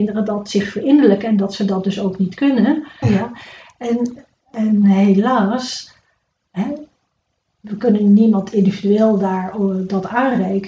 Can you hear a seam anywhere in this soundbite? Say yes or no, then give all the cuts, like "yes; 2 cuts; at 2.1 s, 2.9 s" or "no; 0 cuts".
yes; 1 cut; at 3.0 s